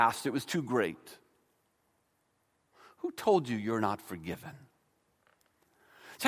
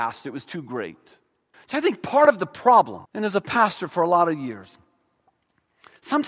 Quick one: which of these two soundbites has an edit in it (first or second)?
second